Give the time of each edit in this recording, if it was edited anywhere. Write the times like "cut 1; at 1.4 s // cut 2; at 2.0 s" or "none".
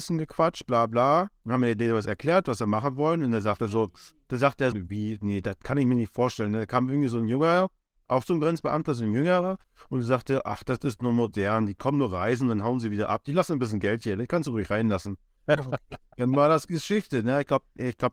cut 1; at 4.7 s